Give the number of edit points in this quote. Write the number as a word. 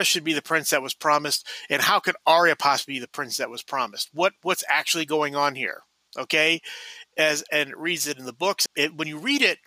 two